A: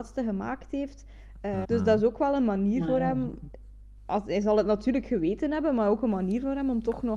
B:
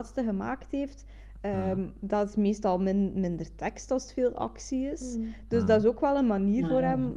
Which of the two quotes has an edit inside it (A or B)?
A